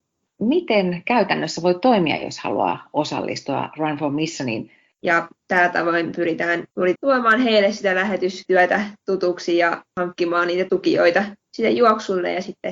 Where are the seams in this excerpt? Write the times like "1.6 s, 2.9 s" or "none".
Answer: 5.0 s, 6.9 s